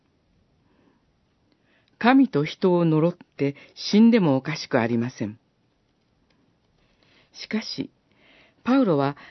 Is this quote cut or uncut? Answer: uncut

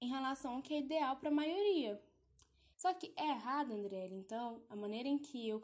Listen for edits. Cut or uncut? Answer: cut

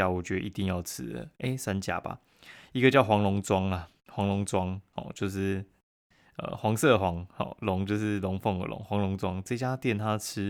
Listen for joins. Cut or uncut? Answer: uncut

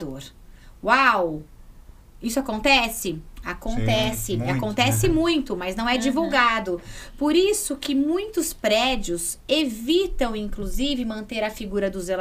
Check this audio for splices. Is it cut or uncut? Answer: uncut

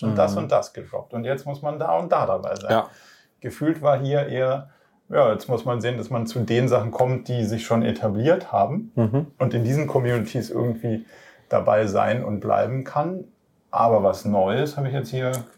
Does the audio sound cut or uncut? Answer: uncut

